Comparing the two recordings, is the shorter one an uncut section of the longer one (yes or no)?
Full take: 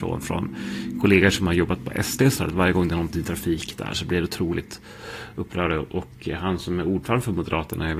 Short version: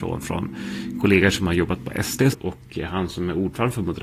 no